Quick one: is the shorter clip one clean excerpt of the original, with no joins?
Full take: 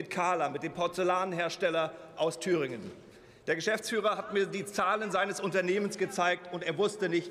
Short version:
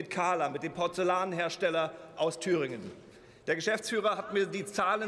yes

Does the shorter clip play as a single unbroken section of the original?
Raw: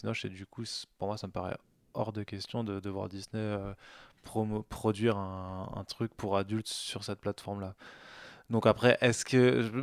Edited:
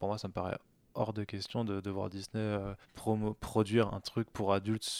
no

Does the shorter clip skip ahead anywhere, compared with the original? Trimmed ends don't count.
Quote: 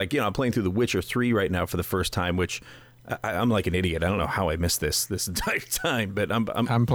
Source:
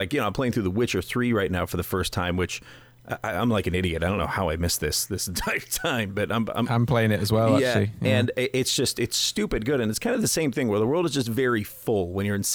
no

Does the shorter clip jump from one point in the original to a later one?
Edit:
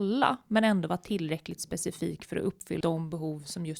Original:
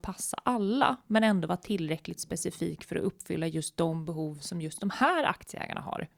yes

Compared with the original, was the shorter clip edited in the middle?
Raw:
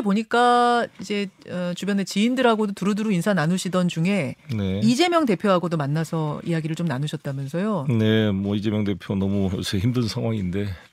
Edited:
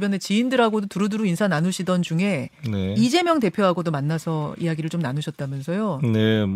no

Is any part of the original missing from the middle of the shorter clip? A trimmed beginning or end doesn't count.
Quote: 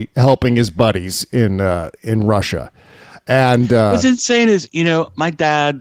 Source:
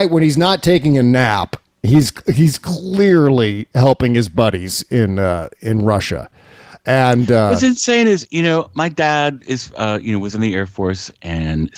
no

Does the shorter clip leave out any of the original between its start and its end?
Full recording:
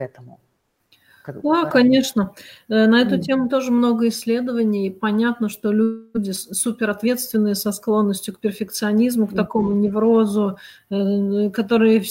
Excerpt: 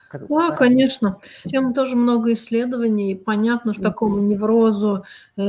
yes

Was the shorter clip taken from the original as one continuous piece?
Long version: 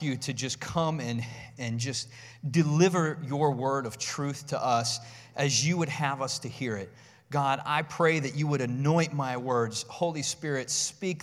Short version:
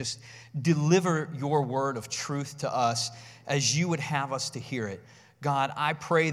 yes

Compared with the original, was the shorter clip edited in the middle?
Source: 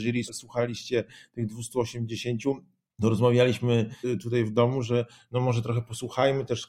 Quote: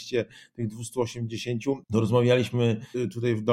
yes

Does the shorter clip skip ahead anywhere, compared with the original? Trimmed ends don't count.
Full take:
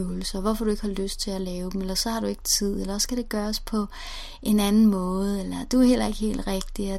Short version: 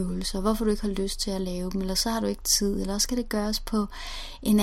no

